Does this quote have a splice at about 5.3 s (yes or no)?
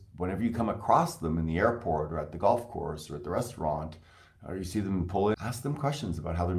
yes